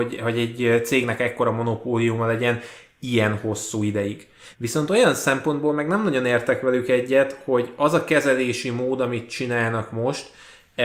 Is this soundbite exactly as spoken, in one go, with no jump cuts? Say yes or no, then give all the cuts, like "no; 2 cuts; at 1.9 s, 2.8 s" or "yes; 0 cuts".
no; 1 cut; at 4.5 s